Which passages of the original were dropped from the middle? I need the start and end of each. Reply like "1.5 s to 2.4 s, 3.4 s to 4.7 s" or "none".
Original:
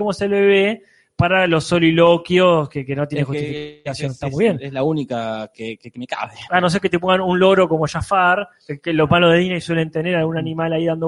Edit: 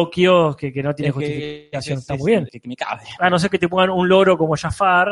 4.6 s to 5.8 s